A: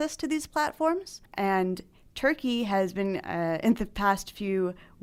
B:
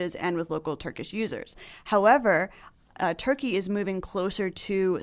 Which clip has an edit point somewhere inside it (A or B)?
A